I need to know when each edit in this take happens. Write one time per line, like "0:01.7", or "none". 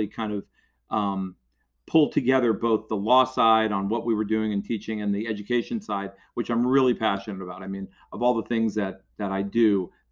none

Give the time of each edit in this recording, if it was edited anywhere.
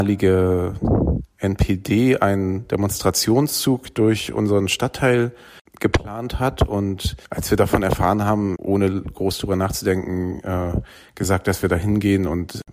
0:07.2
0:08.6

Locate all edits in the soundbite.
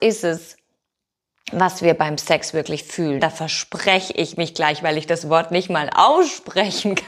0:03.2

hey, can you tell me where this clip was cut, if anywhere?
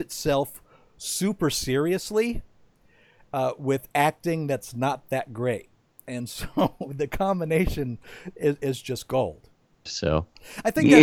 0:09.9

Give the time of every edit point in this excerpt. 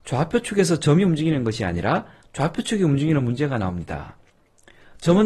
none

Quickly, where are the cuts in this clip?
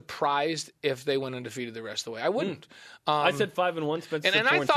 none

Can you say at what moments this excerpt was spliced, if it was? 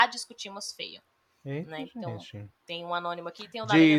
none

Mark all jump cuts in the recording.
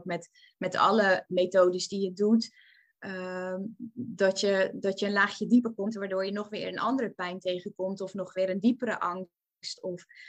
none

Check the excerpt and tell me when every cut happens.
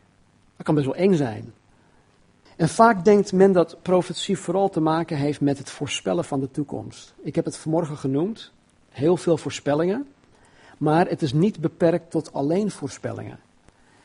0:02.5

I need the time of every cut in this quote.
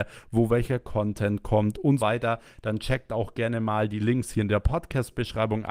0:02.0

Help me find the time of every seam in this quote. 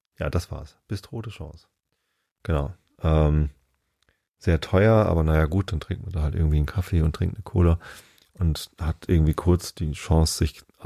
none

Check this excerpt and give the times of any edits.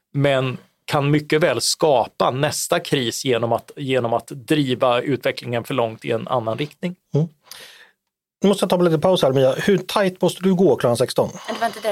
none

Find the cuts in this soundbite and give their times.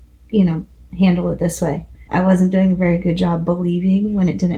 0:02.1

